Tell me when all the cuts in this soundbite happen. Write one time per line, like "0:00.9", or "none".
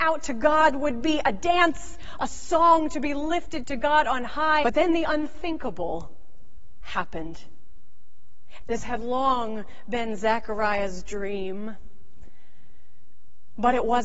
0:04.6
0:08.6